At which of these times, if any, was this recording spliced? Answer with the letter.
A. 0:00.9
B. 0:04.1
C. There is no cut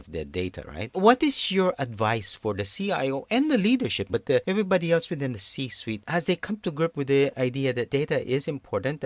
B